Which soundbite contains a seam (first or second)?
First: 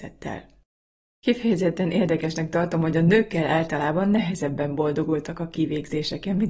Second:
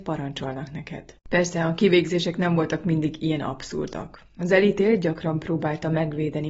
second